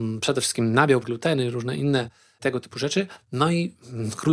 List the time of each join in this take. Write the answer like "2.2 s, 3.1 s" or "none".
1.0 s